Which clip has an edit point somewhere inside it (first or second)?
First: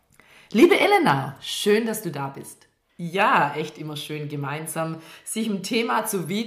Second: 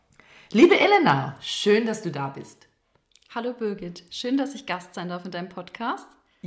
first